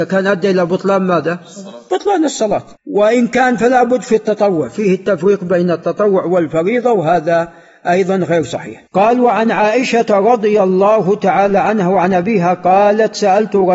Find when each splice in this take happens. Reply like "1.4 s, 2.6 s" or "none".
2.8 s, 8.9 s